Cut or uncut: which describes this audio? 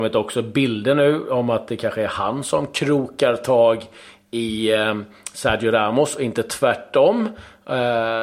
uncut